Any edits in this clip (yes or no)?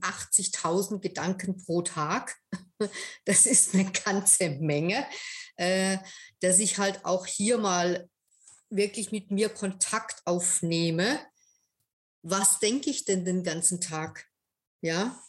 no